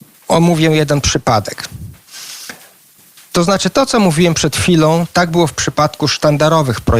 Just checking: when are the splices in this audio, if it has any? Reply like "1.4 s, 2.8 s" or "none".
none